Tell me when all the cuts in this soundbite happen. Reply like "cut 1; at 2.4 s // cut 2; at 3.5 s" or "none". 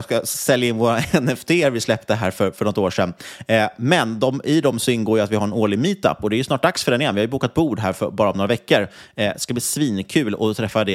none